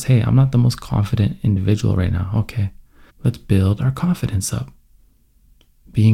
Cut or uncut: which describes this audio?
cut